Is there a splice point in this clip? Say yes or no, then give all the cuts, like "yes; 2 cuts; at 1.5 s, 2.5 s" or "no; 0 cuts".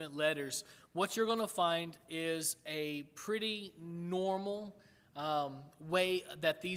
no; 0 cuts